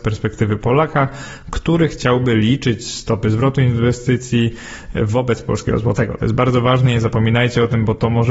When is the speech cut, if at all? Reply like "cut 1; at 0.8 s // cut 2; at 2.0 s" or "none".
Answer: none